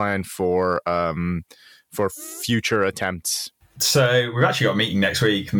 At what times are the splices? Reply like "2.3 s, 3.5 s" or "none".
none